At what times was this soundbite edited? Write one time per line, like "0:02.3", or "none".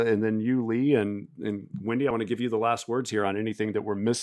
none